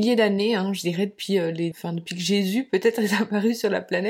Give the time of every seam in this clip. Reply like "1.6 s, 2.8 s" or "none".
1.7 s